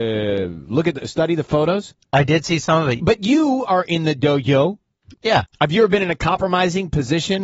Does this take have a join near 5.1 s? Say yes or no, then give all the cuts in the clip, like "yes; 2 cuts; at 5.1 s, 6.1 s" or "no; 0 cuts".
yes; 2 cuts; at 3.0 s, 5.1 s